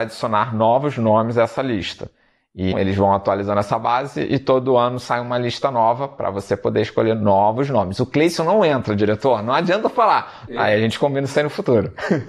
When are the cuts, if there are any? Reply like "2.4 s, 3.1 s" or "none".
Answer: 2.7 s, 10.5 s